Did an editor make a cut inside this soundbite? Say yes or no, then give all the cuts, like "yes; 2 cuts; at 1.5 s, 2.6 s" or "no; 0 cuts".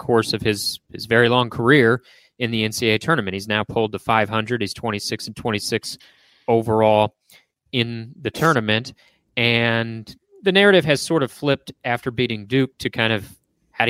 no; 0 cuts